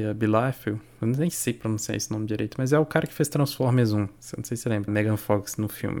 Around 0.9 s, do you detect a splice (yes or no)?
no